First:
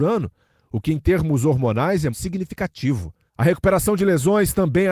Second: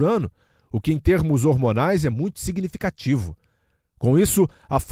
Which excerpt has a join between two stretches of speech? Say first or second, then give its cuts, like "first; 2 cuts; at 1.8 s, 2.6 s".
first; 2 cuts; at 2.1 s, 3.3 s